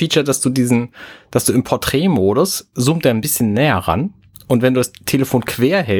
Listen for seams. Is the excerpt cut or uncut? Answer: uncut